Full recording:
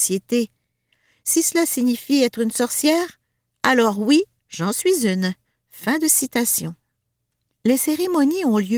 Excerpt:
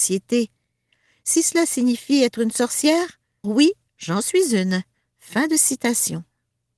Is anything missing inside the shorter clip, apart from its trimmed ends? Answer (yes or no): yes